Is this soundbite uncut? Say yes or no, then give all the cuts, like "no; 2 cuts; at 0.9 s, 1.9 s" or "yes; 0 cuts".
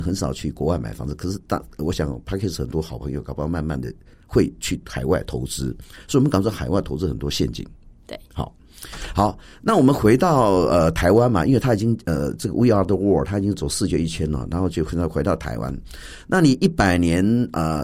yes; 0 cuts